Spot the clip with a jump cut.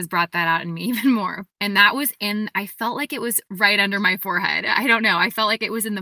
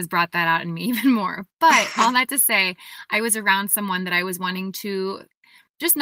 first; 1 cut; at 1.5 s

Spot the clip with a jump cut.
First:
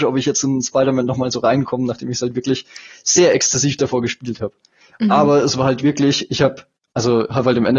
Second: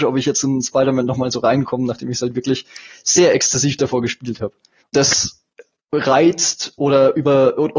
second; 1 cut; at 4.8 s

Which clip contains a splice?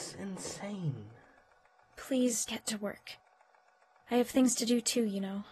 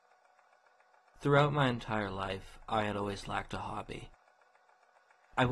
first; 1 cut; at 2.5 s

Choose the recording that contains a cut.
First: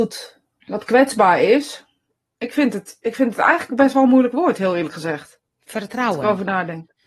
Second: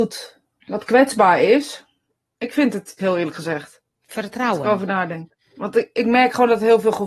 second; 1 cut; at 3.0 s

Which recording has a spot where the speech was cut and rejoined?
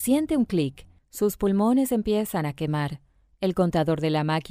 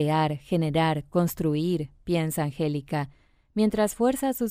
first; 1 cut; at 1.0 s

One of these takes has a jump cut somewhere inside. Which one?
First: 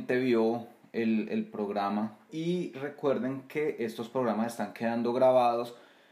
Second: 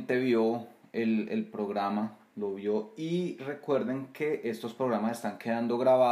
first; 1 cut; at 2.3 s

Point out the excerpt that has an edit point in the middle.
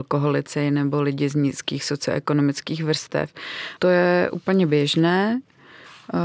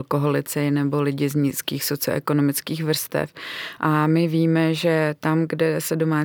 first; 1 cut; at 3.8 s

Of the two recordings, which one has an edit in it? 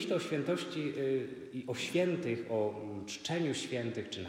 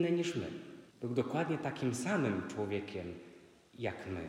second; 1 cut; at 0.9 s

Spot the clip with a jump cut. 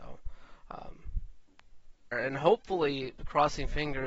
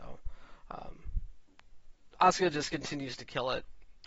first; 1 cut; at 2.1 s

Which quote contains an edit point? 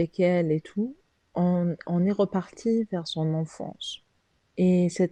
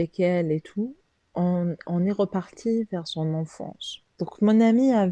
second; 1 cut; at 4.1 s

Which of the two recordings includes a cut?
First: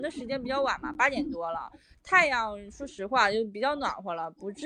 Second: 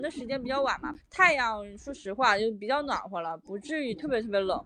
second; 1 cut; at 0.9 s

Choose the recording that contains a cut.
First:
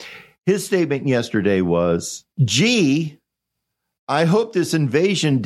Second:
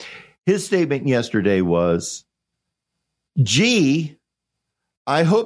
first; 1 cut; at 2.3 s

